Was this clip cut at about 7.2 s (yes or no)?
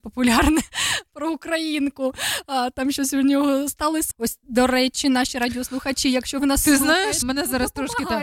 yes